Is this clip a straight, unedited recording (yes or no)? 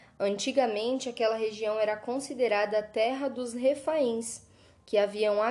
yes